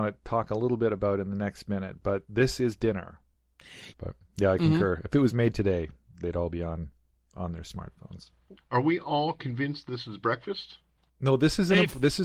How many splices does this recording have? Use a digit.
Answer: 1